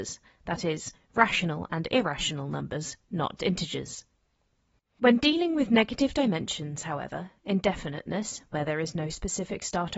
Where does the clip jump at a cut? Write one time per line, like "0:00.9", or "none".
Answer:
0:03.4

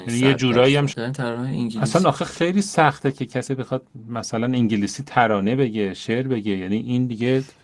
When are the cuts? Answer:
0:00.9

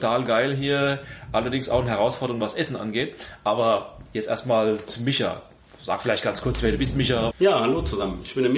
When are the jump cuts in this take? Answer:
0:07.3

